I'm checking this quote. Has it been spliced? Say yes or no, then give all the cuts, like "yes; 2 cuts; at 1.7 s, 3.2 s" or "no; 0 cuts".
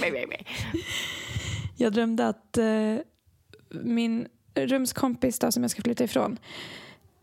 no; 0 cuts